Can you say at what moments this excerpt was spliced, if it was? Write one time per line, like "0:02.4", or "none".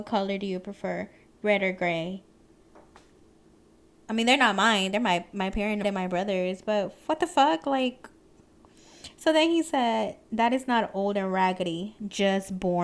0:05.8